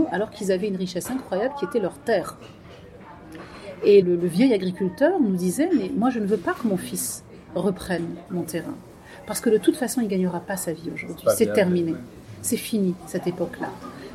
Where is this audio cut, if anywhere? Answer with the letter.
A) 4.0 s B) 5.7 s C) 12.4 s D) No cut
A